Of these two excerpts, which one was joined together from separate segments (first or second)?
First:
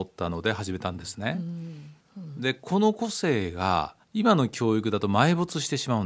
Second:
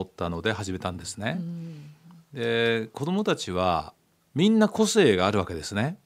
first